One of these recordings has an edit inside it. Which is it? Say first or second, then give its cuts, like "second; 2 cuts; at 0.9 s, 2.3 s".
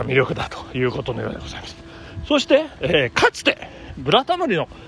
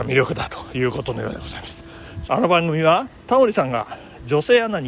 second; 1 cut; at 2.3 s